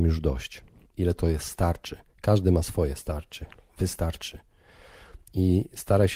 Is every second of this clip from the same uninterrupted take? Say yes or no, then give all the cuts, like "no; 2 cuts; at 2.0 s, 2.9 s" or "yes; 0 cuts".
no; 1 cut; at 0.9 s